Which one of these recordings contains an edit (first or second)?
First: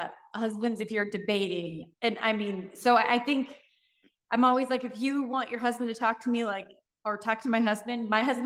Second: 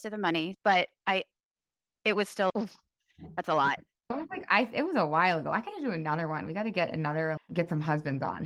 second